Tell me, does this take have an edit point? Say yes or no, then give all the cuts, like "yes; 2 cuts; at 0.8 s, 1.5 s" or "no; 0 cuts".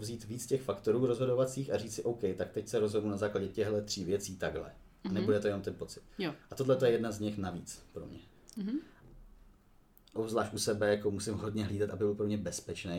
yes; 1 cut; at 8.5 s